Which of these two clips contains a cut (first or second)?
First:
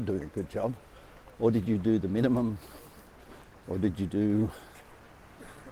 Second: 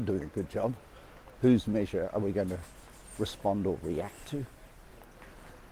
second